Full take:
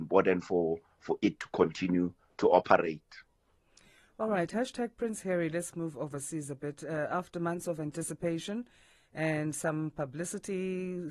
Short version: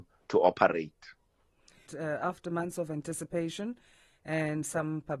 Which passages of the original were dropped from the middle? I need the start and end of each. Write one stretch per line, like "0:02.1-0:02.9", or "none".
0:04.0-0:06.8

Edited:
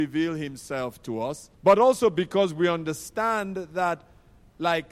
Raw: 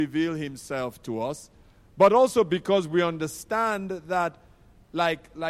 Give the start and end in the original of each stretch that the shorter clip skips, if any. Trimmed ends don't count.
0:01.5-0:01.9

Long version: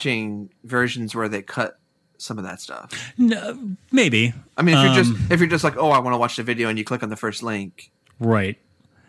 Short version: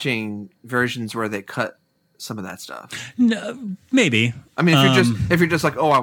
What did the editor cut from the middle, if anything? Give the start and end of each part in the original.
none

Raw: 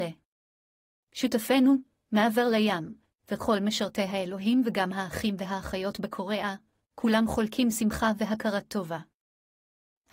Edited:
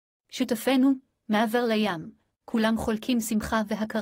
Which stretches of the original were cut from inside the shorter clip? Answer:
0:03.1-0:06.7

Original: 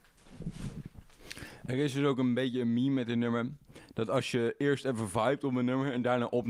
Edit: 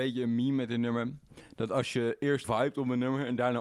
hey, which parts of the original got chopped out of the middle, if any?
0:04.8-0:05.1

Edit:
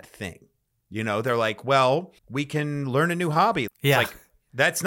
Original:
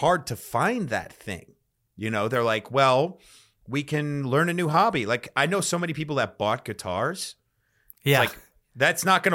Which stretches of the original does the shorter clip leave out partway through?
0:03.2-0:03.6
0:05.1-0:07.9

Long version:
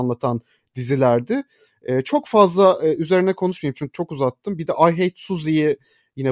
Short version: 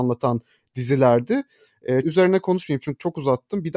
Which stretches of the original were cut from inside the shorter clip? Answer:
0:02.0-0:03.0

